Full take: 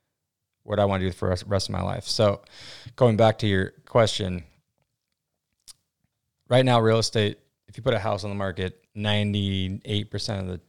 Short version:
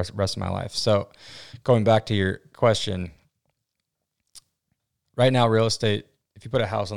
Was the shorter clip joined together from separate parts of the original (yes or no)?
no